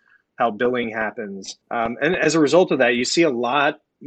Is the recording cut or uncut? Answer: cut